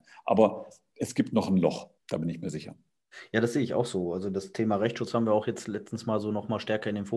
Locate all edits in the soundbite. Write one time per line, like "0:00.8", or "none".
0:02.0